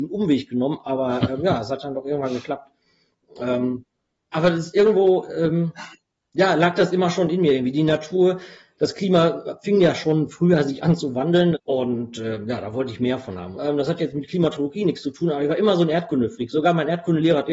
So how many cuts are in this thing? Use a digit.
2